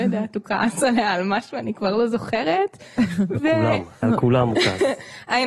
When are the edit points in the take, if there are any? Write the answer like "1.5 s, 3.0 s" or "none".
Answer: 4.0 s